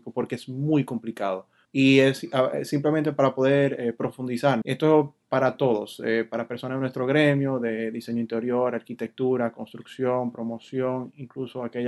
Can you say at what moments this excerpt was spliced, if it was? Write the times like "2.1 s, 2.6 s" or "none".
1.7 s, 4.6 s